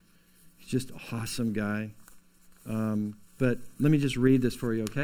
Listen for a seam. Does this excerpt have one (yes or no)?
yes